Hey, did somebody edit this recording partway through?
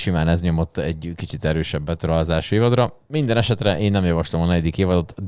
no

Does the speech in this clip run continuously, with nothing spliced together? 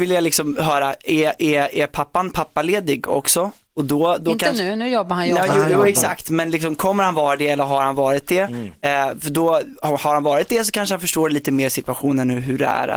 yes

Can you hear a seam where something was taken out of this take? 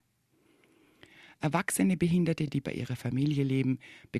no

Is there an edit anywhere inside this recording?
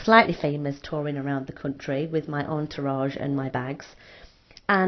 no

